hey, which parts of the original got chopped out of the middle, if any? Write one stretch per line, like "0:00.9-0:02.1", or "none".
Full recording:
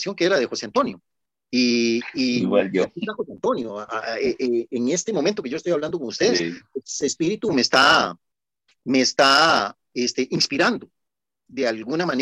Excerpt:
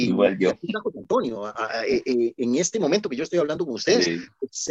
none